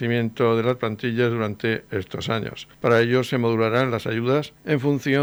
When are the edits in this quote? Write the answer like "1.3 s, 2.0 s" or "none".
none